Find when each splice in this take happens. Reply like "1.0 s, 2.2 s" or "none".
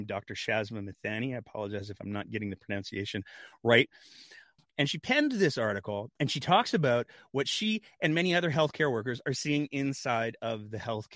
4.6 s, 6.2 s